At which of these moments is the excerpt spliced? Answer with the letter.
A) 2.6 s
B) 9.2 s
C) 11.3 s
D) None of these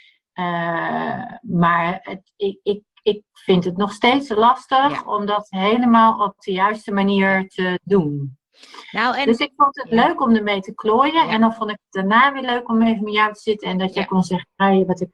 D